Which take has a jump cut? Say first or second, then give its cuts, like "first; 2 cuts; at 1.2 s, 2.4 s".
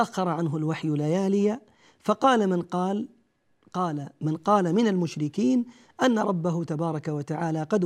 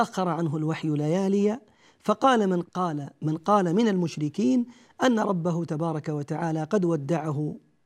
second; 1 cut; at 2.6 s